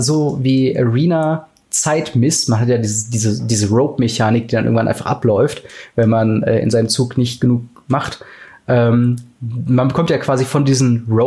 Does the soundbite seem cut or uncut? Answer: uncut